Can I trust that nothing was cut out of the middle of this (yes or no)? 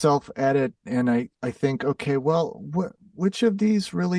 yes